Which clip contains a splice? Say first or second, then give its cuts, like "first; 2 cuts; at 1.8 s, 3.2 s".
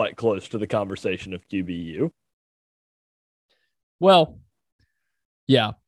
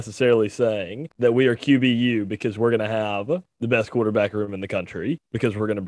second; 1 cut; at 1.1 s